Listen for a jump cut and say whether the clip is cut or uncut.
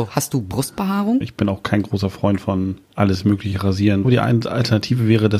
cut